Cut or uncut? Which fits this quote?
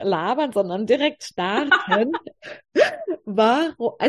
uncut